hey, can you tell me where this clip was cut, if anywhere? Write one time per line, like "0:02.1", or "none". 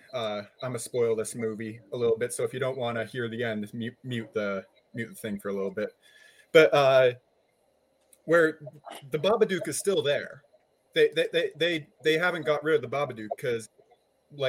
none